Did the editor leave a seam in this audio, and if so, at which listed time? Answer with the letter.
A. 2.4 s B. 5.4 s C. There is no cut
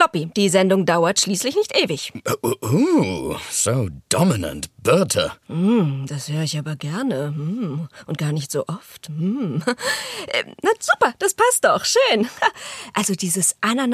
B